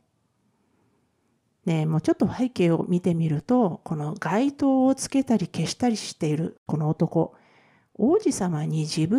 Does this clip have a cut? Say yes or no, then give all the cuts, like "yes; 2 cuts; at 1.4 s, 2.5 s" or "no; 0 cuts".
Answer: no; 0 cuts